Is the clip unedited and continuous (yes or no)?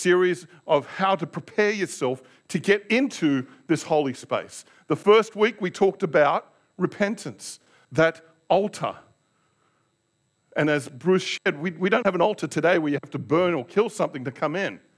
yes